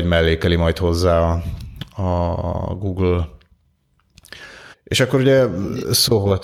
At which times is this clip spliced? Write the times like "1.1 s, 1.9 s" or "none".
4.7 s